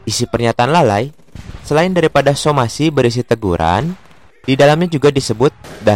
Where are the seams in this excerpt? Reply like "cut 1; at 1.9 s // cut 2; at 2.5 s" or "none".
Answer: cut 1; at 4.3 s